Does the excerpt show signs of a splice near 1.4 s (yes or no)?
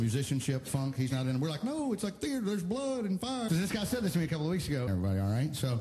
no